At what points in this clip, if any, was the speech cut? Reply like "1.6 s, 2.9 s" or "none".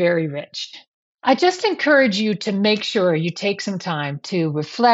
none